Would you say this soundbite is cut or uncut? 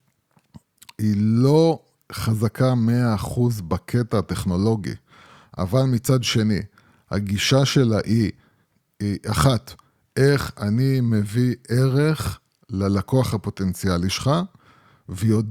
uncut